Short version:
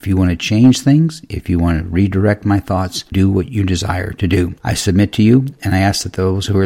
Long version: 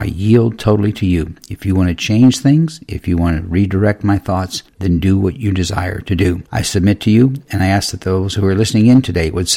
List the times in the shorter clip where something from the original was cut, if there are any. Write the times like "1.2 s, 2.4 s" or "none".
3.1 s